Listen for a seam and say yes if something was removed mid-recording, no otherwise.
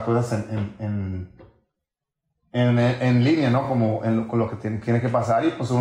no